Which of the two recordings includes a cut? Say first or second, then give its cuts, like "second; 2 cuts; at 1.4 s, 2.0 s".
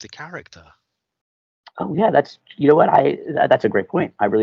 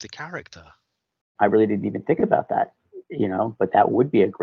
second; 1 cut; at 1.4 s